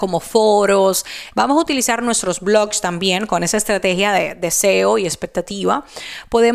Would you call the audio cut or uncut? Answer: cut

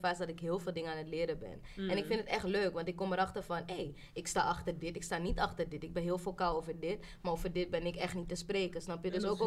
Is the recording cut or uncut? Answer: uncut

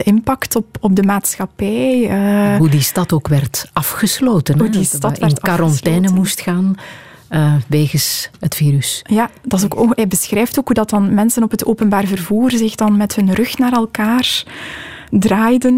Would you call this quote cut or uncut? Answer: uncut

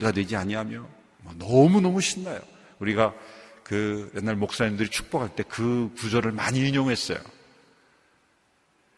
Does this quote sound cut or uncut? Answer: uncut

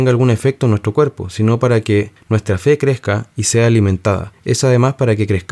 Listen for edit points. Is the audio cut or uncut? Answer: uncut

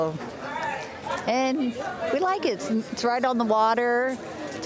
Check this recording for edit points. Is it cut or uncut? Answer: uncut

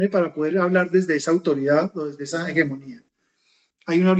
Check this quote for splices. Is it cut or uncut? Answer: uncut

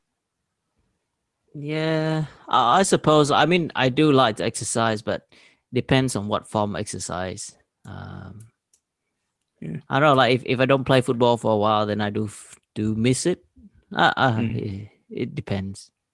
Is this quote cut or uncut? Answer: uncut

